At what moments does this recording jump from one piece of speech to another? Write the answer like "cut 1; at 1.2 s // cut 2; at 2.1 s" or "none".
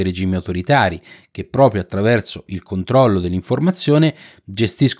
none